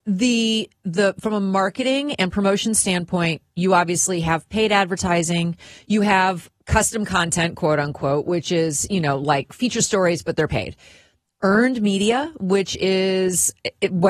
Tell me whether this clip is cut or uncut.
uncut